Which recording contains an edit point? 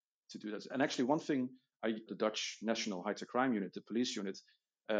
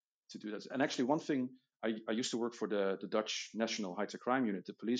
first; 1 cut; at 2.1 s

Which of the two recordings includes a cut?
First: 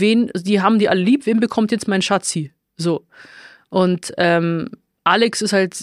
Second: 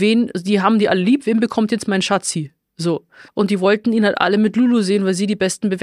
second; 1 cut; at 3.3 s

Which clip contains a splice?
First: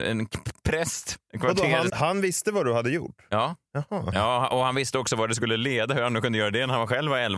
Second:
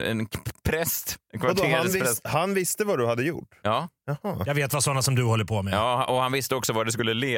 first; 2 cuts; at 1.9 s, 4.1 s

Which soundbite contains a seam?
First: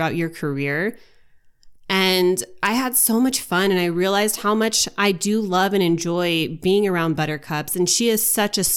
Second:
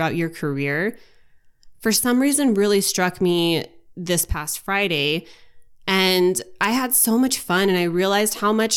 first; 1 cut; at 1.8 s

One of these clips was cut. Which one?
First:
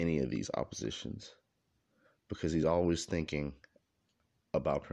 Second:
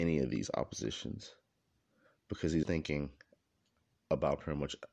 second; 1 cut; at 2.6 s

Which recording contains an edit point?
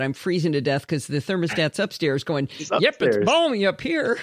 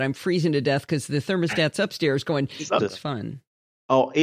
second; 1 cut; at 2.8 s

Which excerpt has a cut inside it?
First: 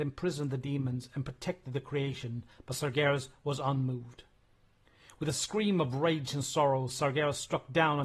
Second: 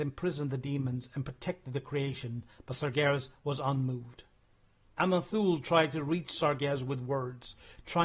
second; 1 cut; at 4.8 s

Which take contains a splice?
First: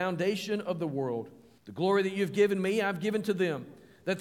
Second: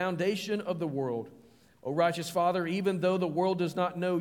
first; 1 cut; at 1.6 s

